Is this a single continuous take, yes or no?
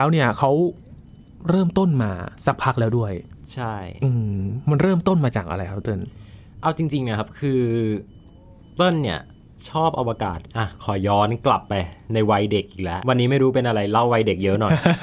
no